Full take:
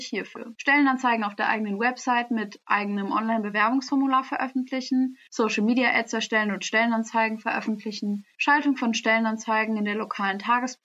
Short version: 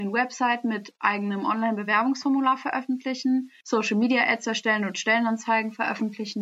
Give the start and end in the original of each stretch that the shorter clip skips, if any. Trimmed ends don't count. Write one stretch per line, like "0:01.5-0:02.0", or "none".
none